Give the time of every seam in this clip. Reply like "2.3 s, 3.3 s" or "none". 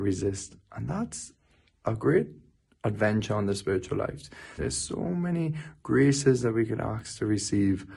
4.6 s